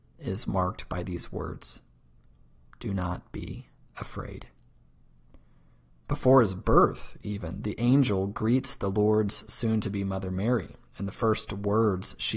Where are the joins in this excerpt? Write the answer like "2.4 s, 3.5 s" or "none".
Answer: none